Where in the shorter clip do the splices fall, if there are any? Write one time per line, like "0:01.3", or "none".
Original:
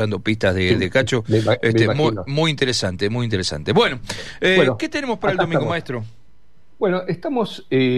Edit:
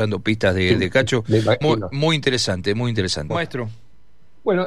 0:01.6
0:03.3